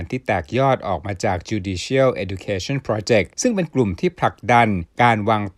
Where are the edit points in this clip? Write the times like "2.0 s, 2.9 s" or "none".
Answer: 3.3 s